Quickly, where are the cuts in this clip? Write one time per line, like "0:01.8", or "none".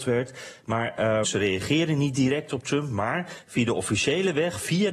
0:01.2